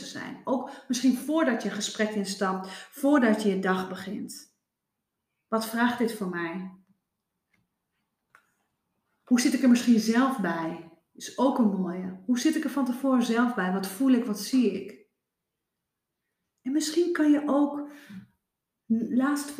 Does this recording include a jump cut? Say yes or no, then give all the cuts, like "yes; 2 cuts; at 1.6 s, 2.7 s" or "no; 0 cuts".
no; 0 cuts